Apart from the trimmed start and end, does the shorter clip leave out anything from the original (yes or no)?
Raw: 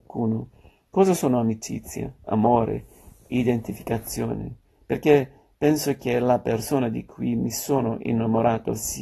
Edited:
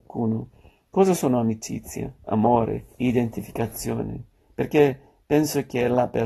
yes